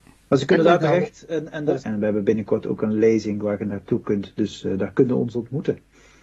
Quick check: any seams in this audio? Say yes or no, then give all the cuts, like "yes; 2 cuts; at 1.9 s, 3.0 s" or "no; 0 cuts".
yes; 1 cut; at 1.8 s